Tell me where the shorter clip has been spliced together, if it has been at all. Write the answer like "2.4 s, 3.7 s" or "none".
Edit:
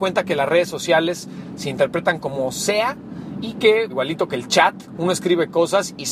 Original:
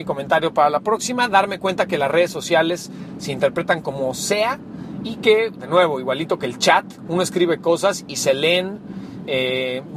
3.9 s